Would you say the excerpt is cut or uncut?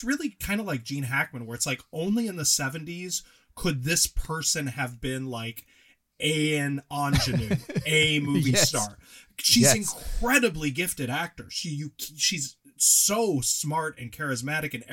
uncut